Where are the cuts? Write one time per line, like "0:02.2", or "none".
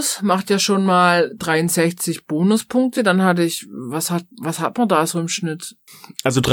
none